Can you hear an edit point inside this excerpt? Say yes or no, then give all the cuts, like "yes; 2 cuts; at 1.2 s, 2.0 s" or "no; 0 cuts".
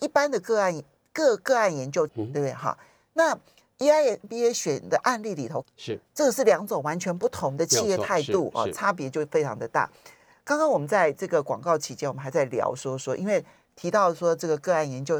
yes; 2 cuts; at 2.1 s, 5.6 s